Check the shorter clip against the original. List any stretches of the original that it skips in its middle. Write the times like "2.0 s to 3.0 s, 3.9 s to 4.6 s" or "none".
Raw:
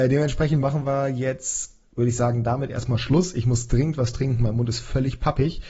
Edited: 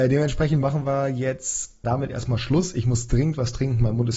1.8 s to 2.4 s